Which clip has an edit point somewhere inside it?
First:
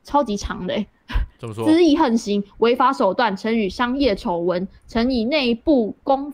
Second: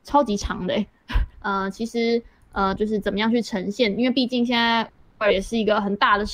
second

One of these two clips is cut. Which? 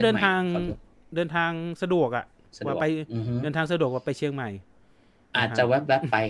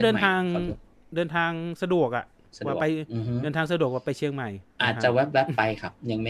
second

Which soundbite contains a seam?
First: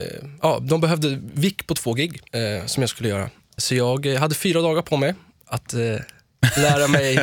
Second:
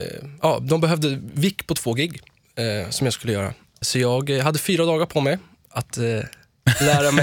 first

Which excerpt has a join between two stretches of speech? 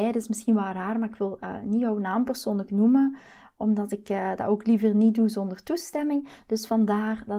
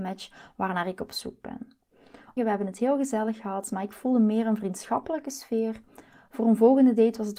second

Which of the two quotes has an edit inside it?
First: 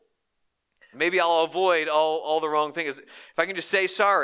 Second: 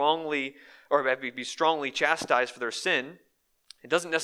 first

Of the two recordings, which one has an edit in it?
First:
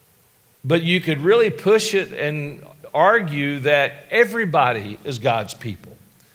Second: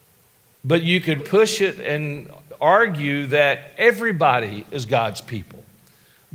second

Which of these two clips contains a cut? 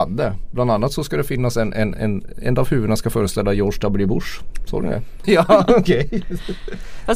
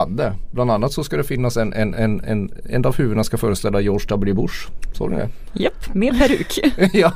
first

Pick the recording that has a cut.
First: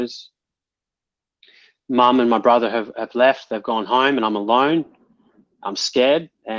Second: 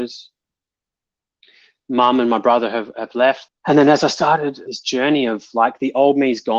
second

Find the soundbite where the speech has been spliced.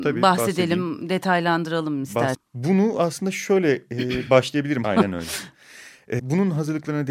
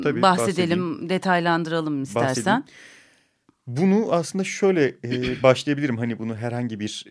first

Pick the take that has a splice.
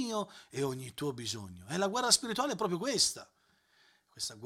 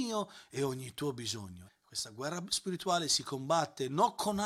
second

